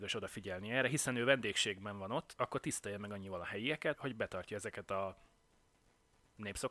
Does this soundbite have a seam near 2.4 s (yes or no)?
yes